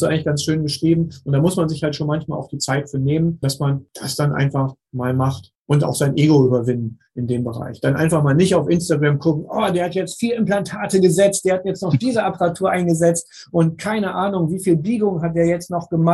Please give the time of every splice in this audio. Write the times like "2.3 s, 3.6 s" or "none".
none